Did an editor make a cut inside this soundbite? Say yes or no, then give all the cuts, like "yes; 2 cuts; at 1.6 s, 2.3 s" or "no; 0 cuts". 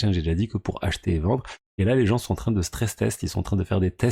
no; 0 cuts